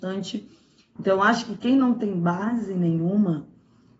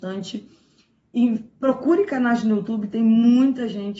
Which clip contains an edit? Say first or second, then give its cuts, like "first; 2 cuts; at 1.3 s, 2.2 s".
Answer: first; 1 cut; at 1.0 s